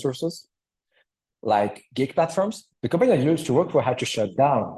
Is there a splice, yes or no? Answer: yes